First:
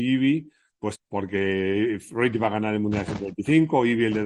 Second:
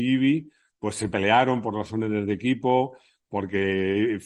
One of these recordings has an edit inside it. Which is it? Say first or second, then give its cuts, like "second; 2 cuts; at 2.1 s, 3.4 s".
first; 1 cut; at 0.9 s